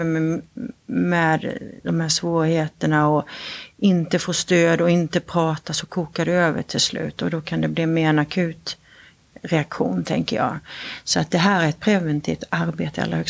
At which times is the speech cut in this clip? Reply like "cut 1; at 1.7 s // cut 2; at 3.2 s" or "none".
none